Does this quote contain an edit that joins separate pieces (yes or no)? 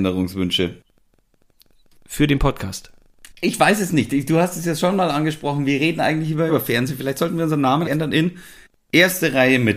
yes